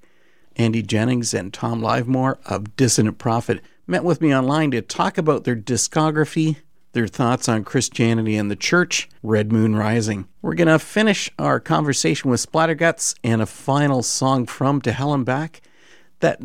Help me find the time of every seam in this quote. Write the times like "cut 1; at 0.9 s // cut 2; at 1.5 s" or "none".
cut 1; at 9.2 s // cut 2; at 10.4 s